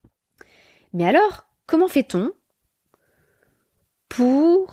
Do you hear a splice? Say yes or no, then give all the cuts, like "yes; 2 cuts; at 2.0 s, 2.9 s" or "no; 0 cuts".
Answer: no; 0 cuts